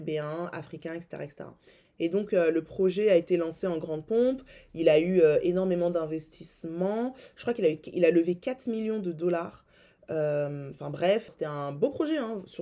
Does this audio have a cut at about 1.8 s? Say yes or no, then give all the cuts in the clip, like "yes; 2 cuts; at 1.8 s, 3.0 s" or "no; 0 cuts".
yes; 2 cuts; at 1.8 s, 11.3 s